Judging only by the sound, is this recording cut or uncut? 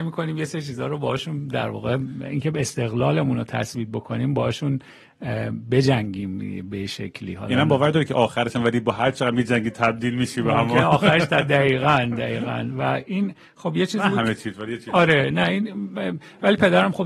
uncut